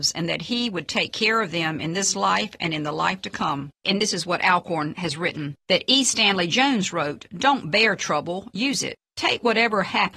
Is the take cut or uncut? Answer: cut